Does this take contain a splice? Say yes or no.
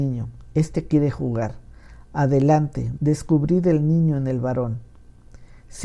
yes